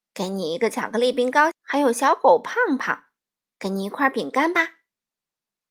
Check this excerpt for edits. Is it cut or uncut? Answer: cut